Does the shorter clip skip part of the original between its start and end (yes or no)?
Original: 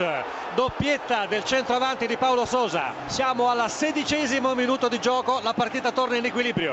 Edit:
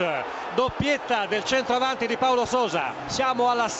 no